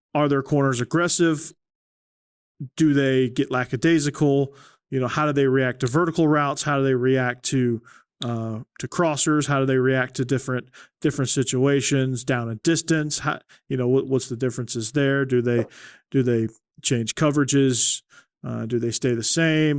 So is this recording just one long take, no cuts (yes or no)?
yes